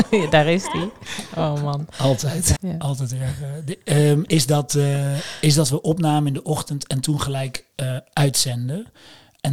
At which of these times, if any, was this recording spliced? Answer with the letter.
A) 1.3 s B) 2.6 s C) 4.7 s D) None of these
B